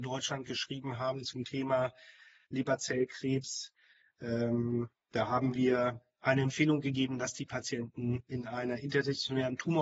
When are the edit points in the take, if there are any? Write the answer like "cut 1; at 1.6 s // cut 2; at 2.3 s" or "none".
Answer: none